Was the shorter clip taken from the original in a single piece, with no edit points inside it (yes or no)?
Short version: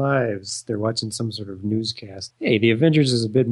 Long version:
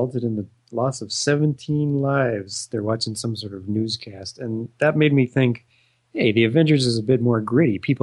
no